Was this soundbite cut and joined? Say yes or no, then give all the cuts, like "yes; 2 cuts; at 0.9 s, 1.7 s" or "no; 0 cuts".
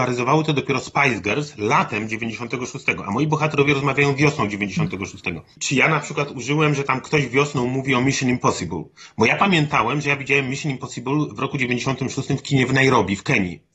no; 0 cuts